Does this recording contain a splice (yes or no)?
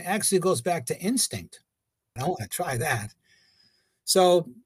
yes